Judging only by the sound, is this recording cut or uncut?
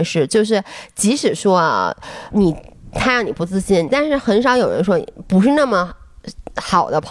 cut